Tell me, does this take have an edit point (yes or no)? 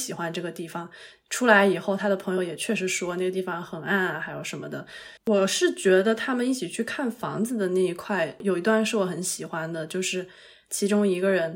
yes